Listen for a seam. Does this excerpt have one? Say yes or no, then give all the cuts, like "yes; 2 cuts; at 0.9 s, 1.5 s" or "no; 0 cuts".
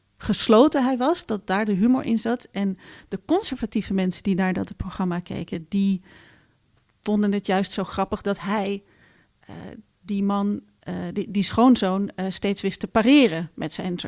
no; 0 cuts